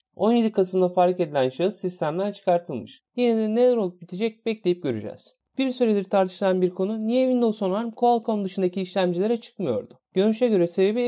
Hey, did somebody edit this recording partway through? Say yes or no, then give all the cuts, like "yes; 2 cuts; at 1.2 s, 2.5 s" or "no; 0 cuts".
yes; 2 cuts; at 3.1 s, 5.5 s